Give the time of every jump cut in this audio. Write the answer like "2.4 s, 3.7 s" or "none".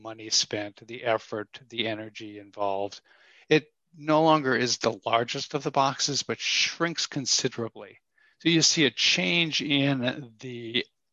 8.3 s